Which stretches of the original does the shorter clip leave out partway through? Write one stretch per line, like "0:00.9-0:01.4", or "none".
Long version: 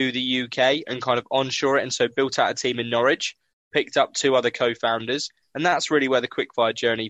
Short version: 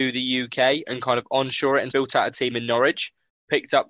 0:01.9-0:02.1